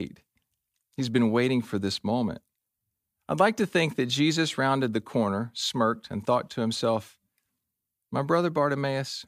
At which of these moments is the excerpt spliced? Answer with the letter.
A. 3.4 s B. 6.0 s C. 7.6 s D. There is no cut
D